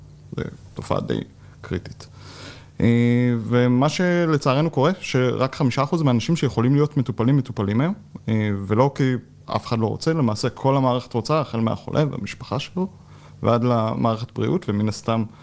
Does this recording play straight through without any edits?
yes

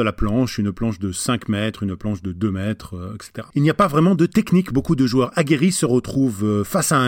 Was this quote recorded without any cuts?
no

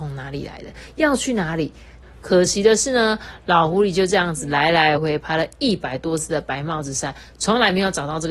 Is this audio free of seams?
no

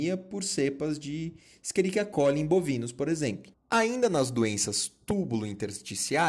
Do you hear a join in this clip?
yes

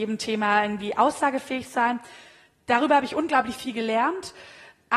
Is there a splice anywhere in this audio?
no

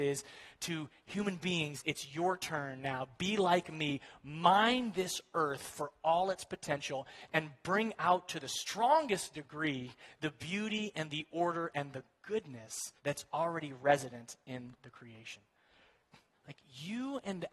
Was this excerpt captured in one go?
no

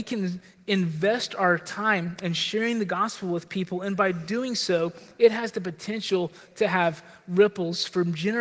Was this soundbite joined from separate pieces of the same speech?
no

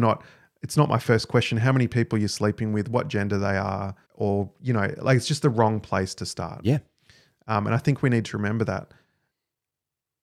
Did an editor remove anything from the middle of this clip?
yes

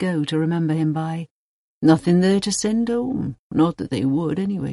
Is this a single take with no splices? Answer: no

